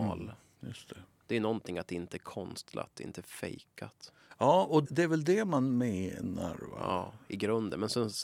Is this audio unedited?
no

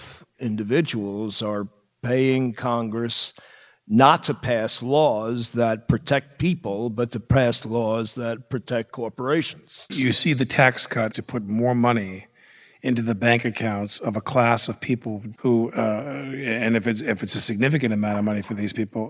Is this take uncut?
no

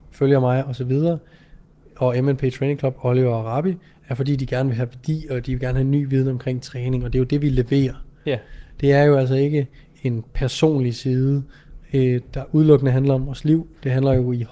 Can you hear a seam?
no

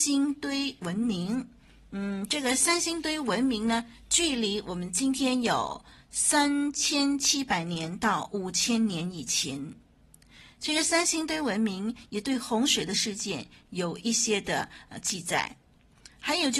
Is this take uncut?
yes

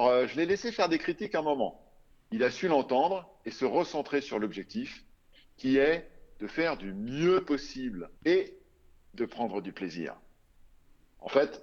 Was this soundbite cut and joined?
yes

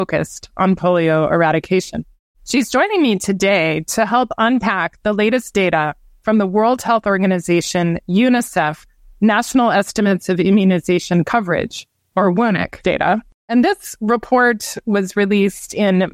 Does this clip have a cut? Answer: no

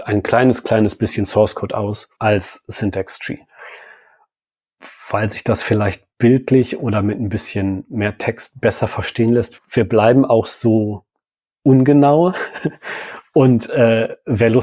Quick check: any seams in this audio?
yes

